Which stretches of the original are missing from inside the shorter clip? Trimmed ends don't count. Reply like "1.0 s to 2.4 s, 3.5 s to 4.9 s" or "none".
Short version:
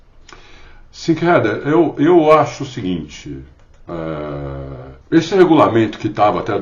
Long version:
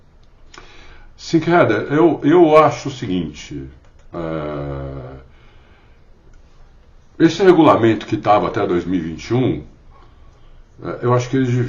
5.3 s to 7.1 s